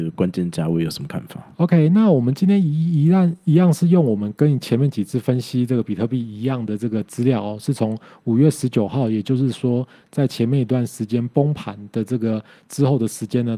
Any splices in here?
no; 0 cuts

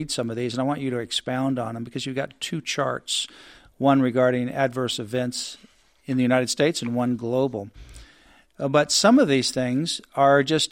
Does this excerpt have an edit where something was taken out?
no; 0 cuts

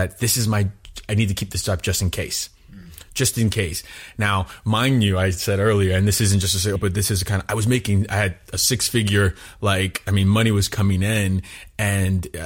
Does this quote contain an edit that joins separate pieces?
yes; 1 cut; at 6.8 s

